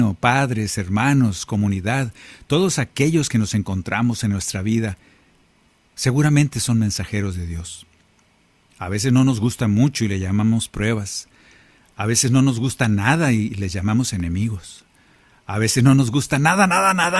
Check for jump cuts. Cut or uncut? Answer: uncut